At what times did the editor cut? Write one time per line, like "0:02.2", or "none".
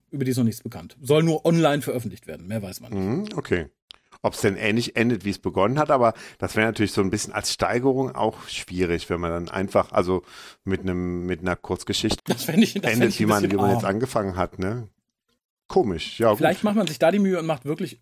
0:12.2